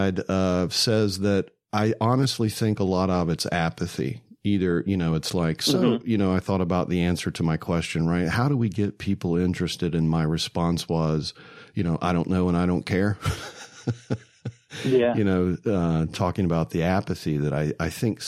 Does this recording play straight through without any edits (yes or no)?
yes